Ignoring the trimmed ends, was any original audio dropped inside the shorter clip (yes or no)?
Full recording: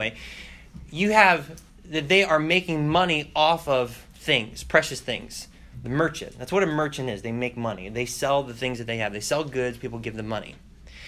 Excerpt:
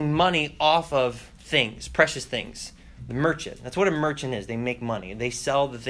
no